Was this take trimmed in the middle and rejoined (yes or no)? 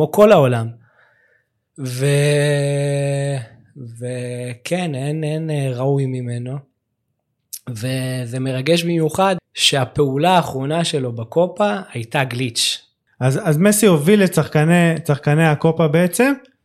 yes